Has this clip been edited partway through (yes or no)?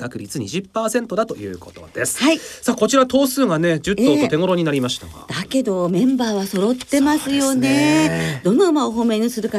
no